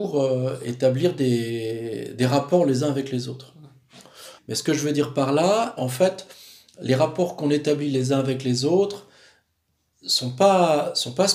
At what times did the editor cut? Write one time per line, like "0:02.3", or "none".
0:04.4
0:05.8